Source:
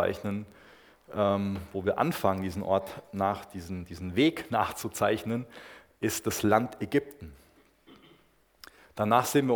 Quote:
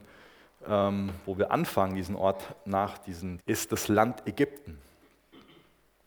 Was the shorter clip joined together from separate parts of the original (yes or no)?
yes